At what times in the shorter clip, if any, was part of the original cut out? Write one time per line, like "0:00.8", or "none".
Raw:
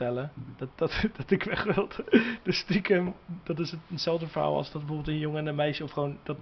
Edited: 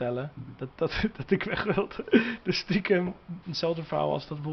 0:03.4